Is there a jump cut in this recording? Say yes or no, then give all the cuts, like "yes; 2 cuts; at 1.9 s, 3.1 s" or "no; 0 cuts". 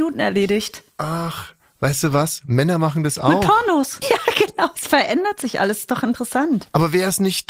yes; 1 cut; at 4.0 s